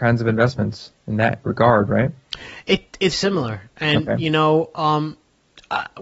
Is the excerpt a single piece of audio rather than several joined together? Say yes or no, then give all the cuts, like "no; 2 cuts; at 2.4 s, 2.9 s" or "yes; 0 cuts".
no; 1 cut; at 3.1 s